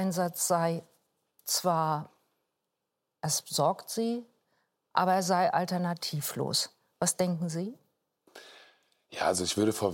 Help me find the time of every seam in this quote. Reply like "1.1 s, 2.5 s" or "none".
none